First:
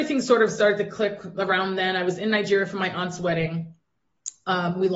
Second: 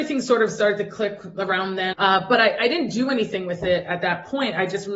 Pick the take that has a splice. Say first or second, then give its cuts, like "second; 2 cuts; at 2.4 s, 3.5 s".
second; 1 cut; at 1.9 s